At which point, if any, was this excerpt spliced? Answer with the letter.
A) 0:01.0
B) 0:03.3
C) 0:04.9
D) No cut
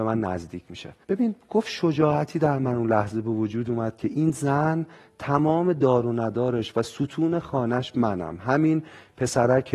A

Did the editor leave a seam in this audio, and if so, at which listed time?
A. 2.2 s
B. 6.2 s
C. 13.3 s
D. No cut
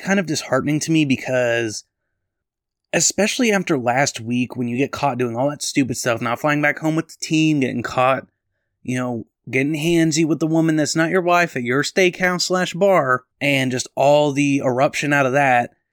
C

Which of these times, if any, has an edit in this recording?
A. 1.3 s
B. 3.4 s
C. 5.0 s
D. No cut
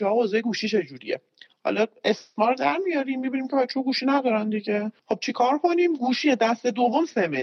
C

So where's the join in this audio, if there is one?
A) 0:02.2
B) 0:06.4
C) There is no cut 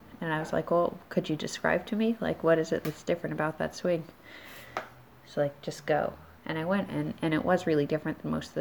B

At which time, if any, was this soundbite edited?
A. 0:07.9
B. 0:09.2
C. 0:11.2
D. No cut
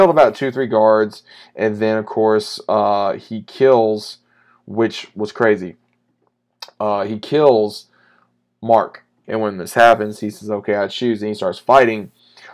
B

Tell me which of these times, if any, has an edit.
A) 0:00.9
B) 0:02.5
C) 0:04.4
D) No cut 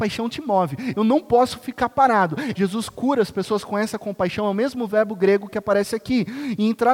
B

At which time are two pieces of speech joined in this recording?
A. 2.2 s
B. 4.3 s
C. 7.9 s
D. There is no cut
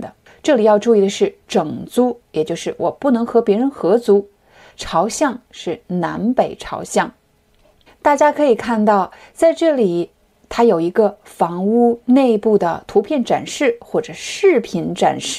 C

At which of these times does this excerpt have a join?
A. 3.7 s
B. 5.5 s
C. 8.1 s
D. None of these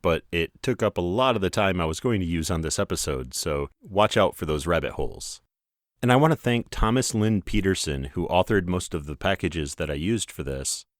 A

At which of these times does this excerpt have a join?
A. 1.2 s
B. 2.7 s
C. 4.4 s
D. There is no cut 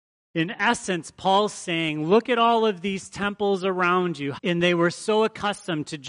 C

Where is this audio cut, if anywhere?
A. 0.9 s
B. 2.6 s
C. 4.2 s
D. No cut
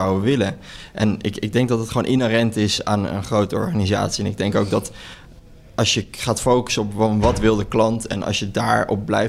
D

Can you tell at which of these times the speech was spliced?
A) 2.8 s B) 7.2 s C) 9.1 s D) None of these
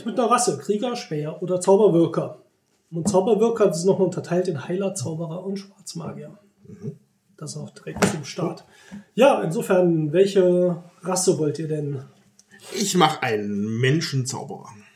D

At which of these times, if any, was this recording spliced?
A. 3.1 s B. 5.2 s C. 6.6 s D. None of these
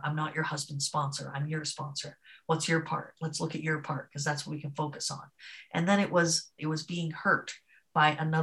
C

